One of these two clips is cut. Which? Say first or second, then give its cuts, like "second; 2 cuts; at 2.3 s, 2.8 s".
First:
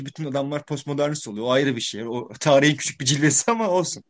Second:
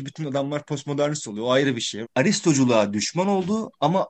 second; 1 cut; at 2.0 s